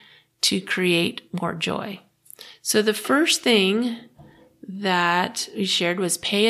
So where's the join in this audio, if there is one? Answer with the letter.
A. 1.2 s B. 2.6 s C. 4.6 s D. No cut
D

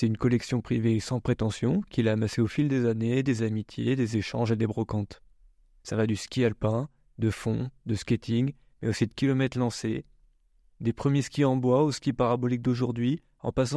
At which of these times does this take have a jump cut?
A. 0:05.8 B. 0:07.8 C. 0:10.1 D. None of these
A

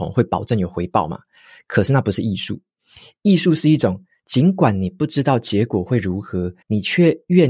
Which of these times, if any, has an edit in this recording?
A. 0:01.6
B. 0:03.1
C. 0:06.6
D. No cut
C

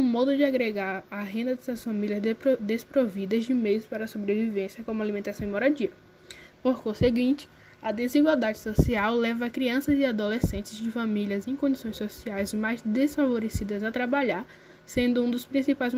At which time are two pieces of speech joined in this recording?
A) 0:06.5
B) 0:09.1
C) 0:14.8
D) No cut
A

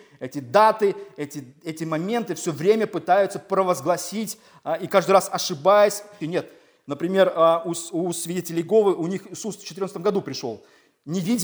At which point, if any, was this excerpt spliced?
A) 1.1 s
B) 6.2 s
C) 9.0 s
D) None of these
B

